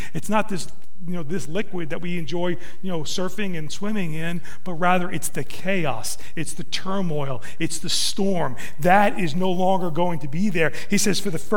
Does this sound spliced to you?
no; 0 cuts

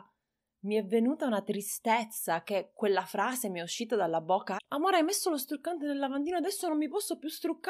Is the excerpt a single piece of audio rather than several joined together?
no; 1 cut; at 4.6 s

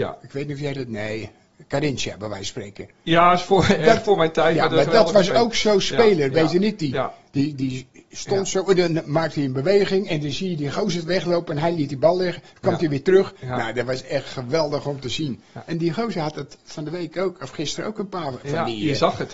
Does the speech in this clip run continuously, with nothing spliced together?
yes; 0 cuts

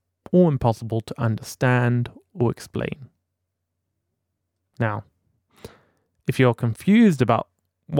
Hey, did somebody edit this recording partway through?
no; 0 cuts

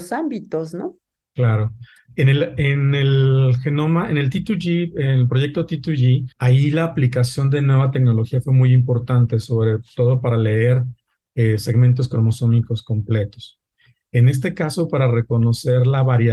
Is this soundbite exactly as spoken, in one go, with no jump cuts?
yes; 0 cuts

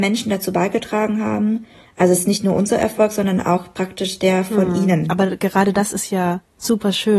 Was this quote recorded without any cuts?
no; 1 cut; at 1.8 s

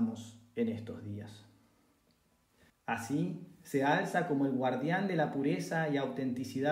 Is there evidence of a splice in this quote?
yes; 1 cut; at 2.7 s

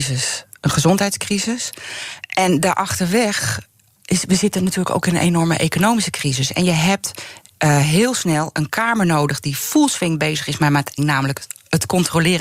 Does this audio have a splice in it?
yes; 1 cut; at 11.0 s

